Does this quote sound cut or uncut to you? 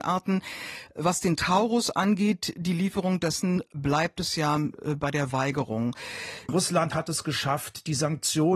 cut